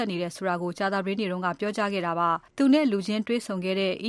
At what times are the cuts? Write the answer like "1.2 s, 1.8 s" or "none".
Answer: 2.5 s